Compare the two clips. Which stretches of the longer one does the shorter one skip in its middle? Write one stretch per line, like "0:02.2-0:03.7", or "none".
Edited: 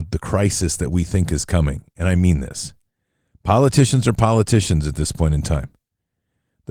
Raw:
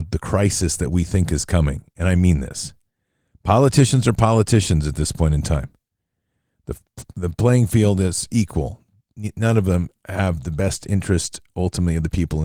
none